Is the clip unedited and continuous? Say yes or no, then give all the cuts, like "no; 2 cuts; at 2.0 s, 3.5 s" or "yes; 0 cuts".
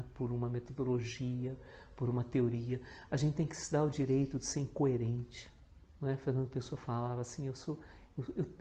yes; 0 cuts